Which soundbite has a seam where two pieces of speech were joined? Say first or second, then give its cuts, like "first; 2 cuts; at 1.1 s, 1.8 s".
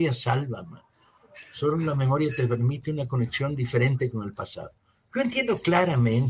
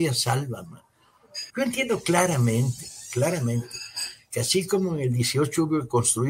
second; 1 cut; at 1.5 s